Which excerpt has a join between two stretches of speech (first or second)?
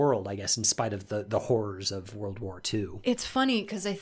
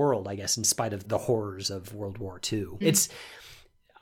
second